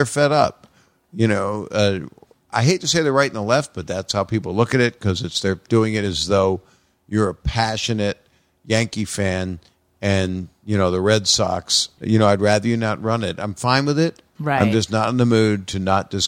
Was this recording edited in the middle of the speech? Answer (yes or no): yes